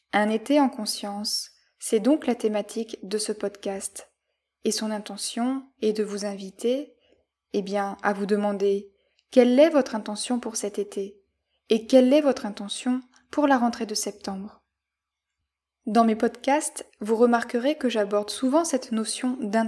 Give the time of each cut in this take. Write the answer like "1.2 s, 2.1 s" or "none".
none